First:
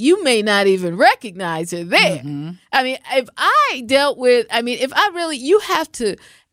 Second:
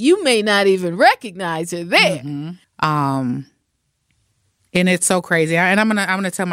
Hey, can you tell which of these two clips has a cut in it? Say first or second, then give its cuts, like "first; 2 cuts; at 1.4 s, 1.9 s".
second; 1 cut; at 2.6 s